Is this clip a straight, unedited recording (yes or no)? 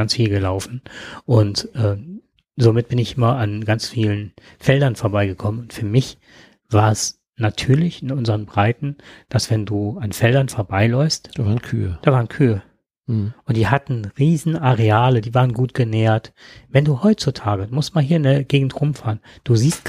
yes